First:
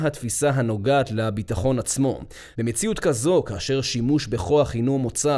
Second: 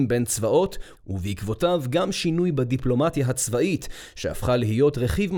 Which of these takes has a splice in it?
first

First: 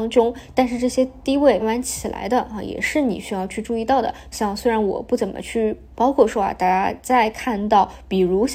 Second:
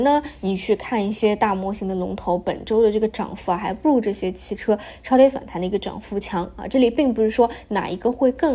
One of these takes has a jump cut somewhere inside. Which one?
first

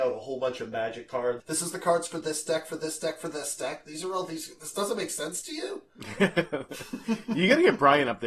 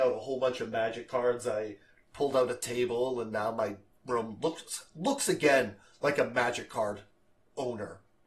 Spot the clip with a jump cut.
first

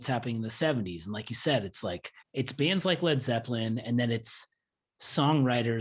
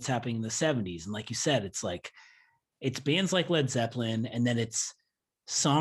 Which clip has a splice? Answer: first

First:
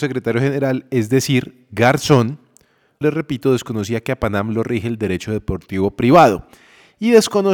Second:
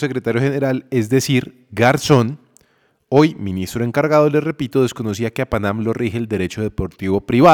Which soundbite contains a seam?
first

